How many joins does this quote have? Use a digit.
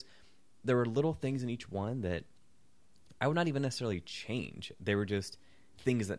0